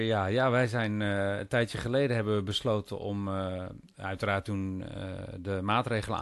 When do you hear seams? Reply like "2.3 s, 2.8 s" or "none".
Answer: none